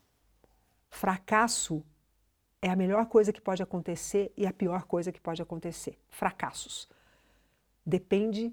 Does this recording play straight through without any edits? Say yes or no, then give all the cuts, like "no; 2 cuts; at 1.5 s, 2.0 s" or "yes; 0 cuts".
yes; 0 cuts